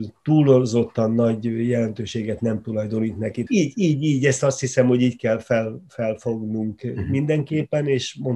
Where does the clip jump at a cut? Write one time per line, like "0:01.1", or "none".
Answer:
0:03.5

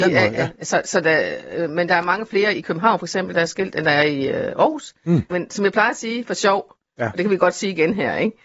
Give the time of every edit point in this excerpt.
0:05.3

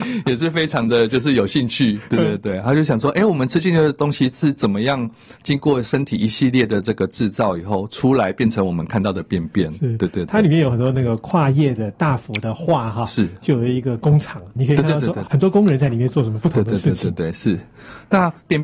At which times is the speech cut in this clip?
none

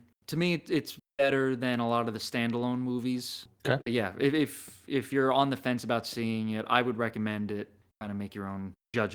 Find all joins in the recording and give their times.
0:03.8

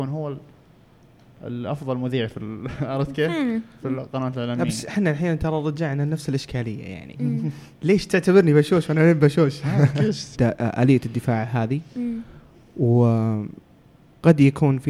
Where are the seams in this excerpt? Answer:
0:10.3

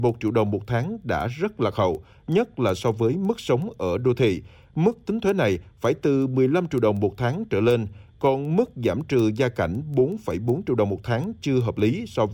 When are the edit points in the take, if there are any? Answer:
none

